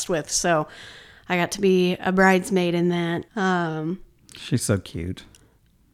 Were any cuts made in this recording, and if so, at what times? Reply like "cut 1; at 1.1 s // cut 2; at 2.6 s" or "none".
cut 1; at 3.3 s